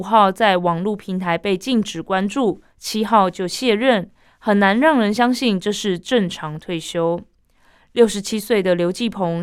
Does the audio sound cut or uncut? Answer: uncut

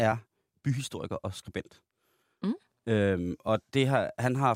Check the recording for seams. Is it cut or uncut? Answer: uncut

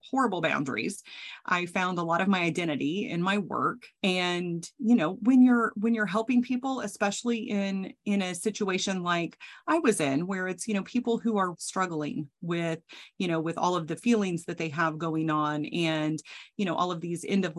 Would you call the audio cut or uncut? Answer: cut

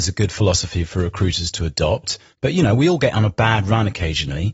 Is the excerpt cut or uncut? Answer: cut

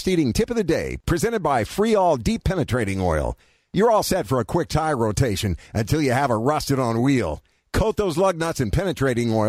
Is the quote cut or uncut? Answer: uncut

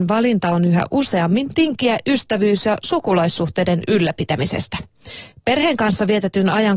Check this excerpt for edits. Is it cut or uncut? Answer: cut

